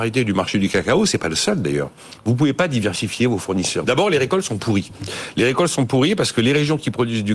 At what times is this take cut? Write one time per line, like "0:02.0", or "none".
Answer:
0:02.2
0:03.8